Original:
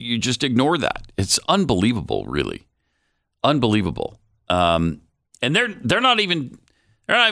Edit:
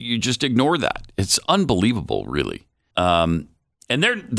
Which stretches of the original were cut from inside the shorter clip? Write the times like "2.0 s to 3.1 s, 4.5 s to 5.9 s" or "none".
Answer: 2.9 s to 4.4 s

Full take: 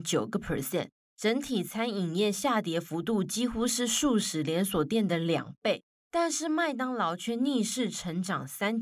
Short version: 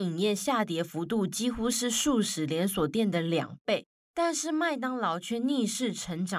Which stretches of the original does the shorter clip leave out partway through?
none

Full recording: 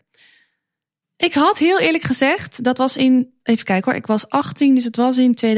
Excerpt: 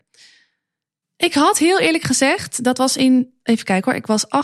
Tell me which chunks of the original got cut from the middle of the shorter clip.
none

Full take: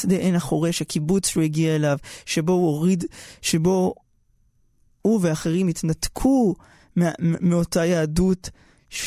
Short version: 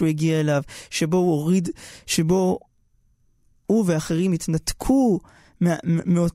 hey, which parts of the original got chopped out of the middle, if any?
none

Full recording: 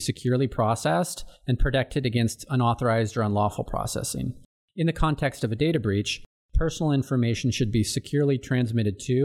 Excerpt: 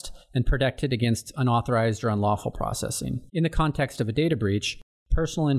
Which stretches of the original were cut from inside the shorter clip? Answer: 4.4 s to 4.7 s

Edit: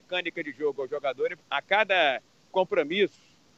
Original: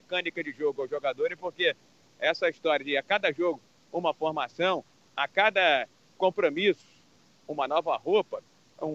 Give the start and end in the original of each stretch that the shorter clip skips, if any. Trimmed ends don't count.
1.4 s to 5.0 s

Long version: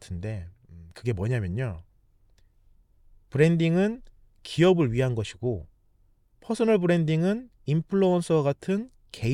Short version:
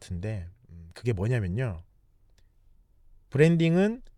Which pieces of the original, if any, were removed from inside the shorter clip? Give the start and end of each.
none

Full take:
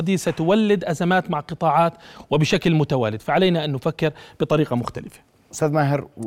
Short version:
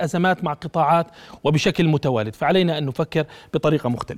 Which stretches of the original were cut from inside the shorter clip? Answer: none

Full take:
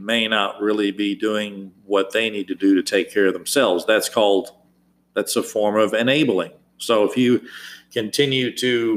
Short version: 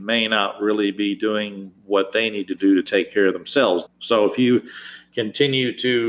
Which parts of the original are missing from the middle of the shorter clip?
3.9 s to 6.6 s

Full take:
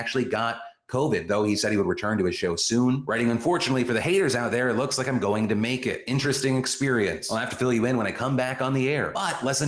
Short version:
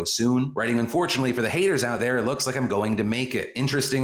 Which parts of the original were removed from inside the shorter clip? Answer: none

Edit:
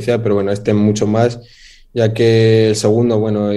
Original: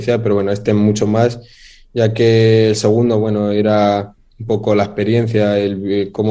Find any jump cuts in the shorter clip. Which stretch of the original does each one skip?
none

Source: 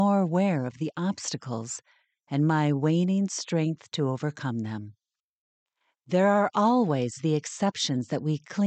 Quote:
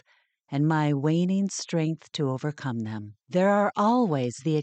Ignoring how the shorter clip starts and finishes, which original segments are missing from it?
5.0 s to 6.0 s

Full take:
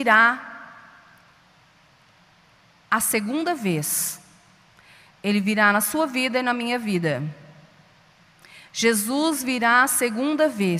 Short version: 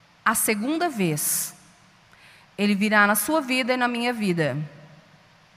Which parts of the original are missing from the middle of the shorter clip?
none

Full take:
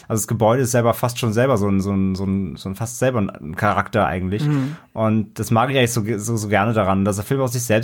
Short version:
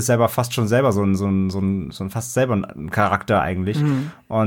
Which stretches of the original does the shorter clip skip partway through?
none

